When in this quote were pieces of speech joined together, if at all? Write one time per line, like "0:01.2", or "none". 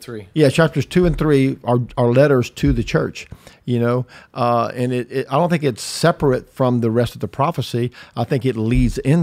none